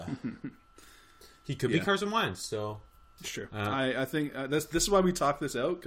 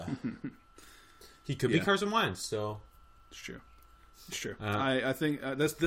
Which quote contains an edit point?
first; 1 cut; at 3.2 s

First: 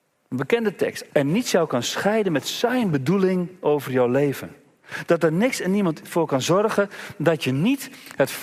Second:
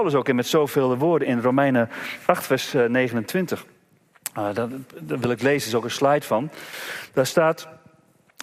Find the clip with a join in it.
first; 1 cut; at 1.1 s

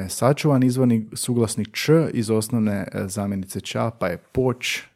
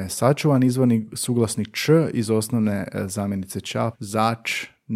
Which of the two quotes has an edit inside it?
second; 1 cut; at 3.9 s

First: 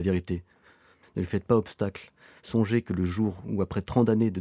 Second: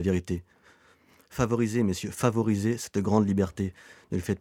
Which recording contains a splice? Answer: first; 1 cut; at 1.0 s

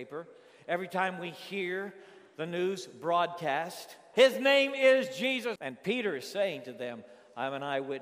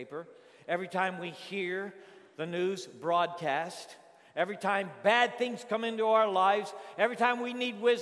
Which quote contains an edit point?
first; 2 cuts; at 4.1 s, 5.6 s

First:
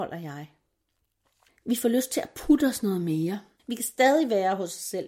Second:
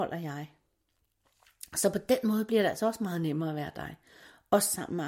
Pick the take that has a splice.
first; 2 cuts; at 1.5 s, 3.6 s

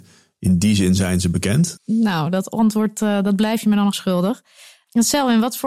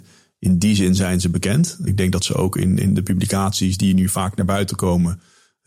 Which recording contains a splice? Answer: first; 2 cuts; at 1.8 s, 3.9 s

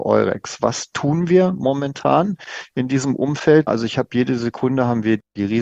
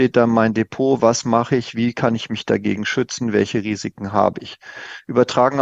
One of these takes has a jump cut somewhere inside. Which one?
first; 1 cut; at 3.7 s

